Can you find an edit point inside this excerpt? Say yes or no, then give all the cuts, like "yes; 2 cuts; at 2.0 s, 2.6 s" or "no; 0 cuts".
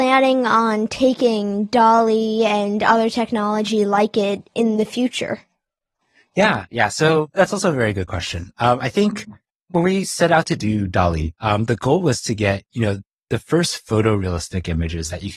no; 0 cuts